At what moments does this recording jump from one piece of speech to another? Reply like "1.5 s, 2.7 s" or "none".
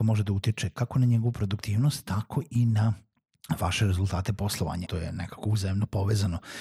4.9 s